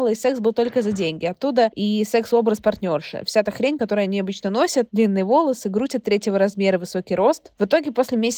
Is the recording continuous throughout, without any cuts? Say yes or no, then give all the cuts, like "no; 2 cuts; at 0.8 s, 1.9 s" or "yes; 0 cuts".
yes; 0 cuts